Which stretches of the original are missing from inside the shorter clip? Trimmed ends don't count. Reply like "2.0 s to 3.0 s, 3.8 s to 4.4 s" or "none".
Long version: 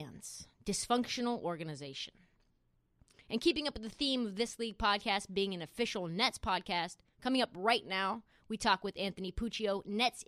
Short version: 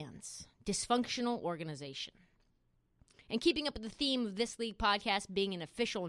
none